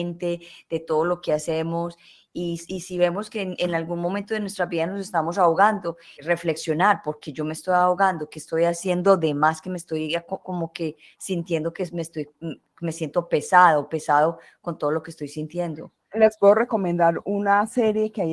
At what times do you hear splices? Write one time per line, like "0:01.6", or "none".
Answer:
0:06.2
0:16.1